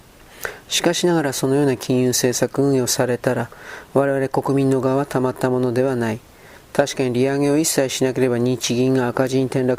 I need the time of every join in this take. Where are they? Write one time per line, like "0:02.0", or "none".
none